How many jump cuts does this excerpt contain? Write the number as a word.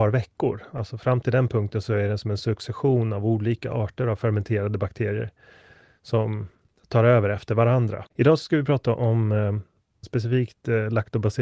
two